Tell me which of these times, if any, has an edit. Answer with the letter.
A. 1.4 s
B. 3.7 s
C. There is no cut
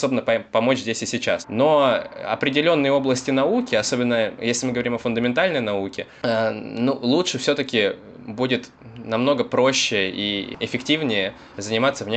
A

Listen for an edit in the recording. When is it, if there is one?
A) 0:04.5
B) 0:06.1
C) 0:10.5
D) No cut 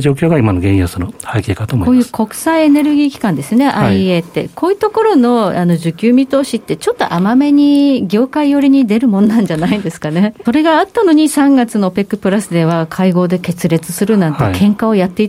C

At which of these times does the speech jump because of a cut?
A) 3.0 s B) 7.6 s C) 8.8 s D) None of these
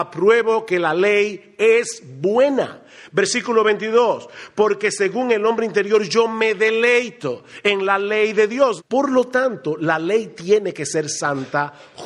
C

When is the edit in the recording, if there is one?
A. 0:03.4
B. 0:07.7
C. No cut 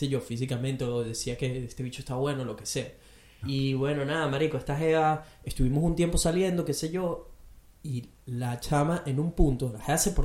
A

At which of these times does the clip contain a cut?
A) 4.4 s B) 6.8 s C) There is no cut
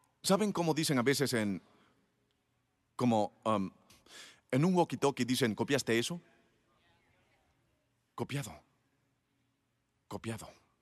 C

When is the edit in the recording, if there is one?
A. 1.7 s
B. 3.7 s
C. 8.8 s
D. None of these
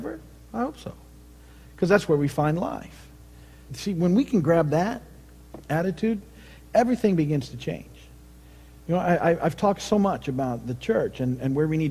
B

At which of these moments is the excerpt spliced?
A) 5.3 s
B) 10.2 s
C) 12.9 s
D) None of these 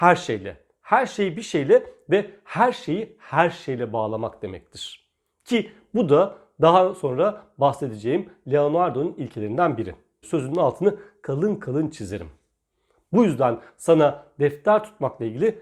B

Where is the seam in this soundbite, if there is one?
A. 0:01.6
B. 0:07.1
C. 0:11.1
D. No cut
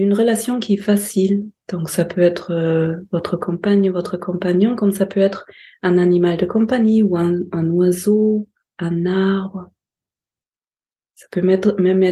D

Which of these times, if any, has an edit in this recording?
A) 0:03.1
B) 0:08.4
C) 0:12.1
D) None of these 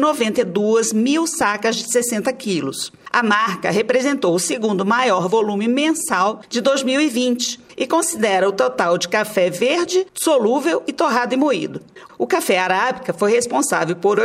C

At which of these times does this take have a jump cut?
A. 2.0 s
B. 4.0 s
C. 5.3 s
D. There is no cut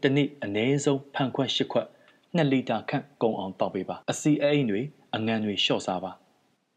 B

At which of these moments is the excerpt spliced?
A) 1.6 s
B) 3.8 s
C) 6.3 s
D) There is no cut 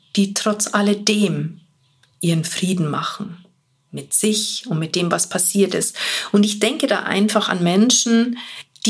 D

